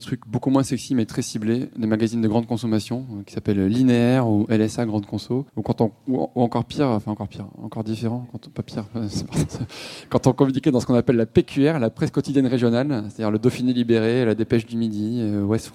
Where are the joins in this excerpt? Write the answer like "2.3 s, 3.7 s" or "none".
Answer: 5.5 s